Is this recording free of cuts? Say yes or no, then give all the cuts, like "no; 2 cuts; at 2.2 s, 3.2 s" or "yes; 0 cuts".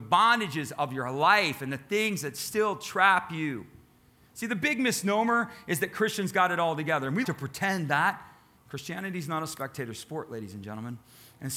no; 2 cuts; at 7.2 s, 8.6 s